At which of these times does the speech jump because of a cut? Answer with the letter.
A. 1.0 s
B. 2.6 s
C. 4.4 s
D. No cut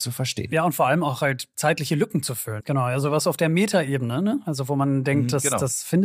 B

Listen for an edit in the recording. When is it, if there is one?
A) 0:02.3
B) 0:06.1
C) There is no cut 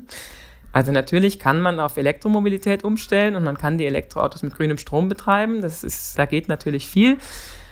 B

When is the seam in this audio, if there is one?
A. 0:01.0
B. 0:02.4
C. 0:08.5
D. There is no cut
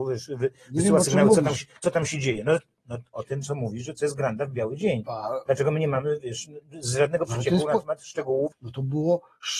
C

